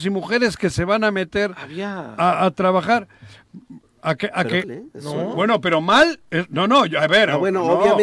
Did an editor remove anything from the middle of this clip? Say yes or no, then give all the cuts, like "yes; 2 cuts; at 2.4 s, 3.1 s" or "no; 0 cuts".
yes; 1 cut; at 4.6 s